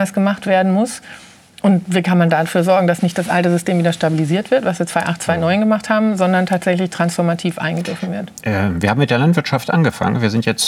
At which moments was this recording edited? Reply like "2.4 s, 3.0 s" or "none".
none